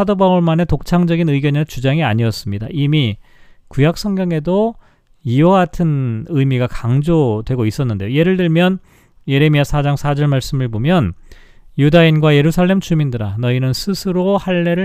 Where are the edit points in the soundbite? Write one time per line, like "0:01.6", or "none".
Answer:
none